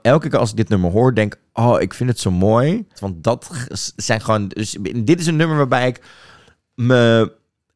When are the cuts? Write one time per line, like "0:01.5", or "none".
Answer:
0:03.0